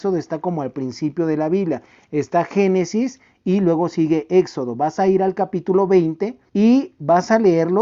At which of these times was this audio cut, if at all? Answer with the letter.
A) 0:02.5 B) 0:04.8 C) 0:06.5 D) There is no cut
C